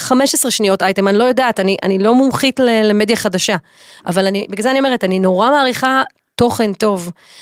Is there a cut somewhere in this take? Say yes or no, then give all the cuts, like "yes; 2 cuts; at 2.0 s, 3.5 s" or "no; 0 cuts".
no; 0 cuts